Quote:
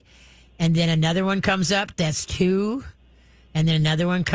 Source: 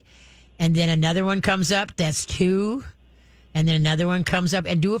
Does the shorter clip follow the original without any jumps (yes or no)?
yes